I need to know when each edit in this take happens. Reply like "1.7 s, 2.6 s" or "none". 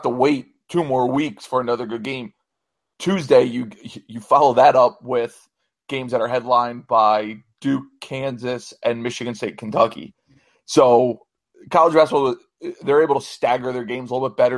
none